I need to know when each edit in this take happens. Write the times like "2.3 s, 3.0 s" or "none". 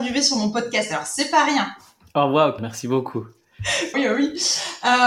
2.6 s, 3.9 s